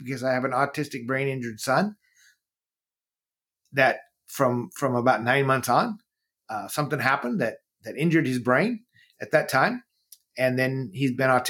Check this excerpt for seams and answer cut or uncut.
cut